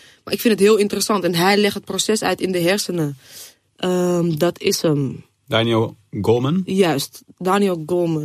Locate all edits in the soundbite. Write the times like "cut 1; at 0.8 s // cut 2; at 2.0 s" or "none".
none